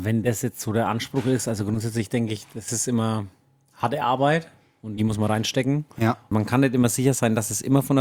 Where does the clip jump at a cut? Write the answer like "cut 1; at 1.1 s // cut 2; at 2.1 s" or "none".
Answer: cut 1; at 6.3 s